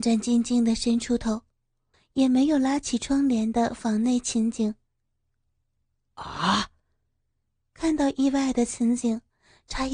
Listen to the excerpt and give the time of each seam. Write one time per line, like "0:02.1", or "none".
0:01.9